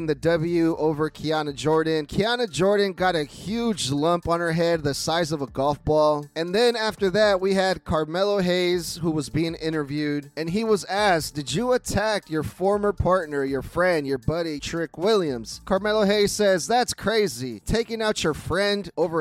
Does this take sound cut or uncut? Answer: cut